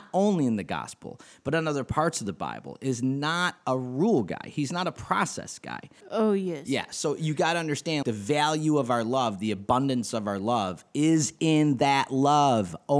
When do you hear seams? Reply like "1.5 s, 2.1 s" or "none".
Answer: 6.0 s, 8.0 s